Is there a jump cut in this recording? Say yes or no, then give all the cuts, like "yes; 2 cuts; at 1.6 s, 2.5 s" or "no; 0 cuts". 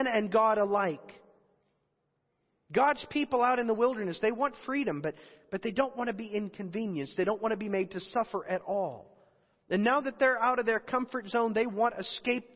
no; 0 cuts